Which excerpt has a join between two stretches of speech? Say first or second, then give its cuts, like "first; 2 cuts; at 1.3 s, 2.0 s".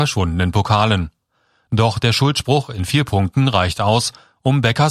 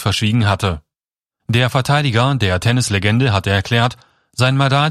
second; 1 cut; at 1.4 s